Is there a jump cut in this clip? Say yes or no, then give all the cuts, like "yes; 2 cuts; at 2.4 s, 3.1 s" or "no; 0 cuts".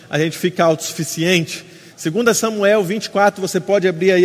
yes; 1 cut; at 1.9 s